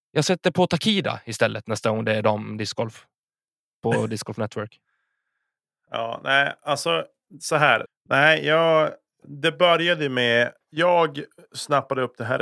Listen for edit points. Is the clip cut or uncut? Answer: cut